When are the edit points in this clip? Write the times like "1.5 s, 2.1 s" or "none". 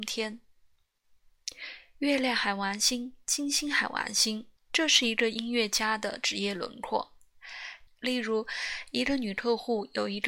4.6 s, 7.9 s